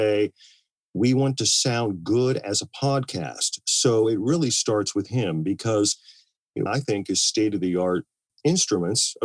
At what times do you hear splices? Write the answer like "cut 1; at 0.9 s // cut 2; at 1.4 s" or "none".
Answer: cut 1; at 6.7 s